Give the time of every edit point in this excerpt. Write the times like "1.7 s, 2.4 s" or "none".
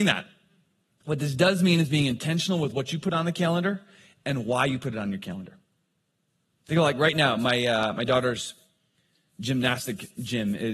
none